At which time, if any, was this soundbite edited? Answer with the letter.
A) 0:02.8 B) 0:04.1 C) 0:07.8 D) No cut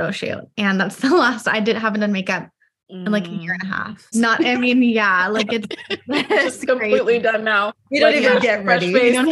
B